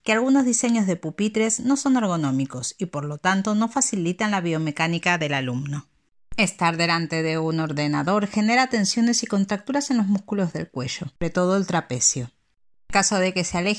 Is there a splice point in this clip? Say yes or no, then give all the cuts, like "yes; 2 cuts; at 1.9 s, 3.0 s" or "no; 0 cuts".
yes; 2 cuts; at 11.2 s, 12.7 s